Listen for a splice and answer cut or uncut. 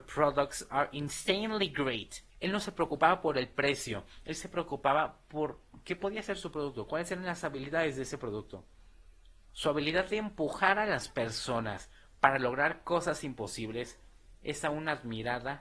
cut